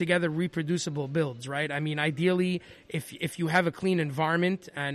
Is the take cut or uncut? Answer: uncut